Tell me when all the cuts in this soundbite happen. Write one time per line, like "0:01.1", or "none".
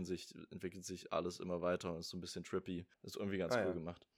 0:02.9

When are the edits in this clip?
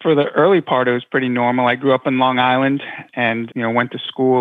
0:03.5

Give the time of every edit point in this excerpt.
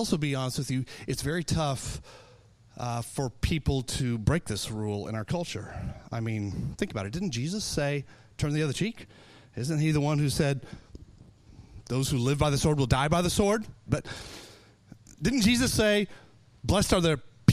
0:13.9
0:15.7

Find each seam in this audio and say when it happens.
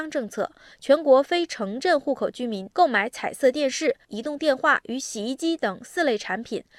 0:04.0

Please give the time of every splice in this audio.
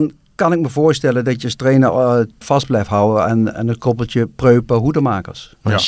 0:02.4
0:03.5

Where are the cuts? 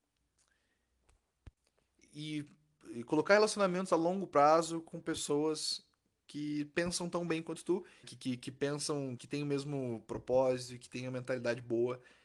0:08.0
0:09.2

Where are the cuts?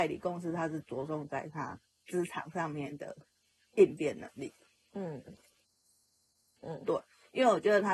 0:06.6

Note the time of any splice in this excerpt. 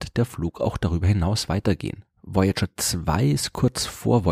none

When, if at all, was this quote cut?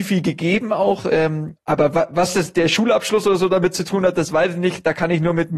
none

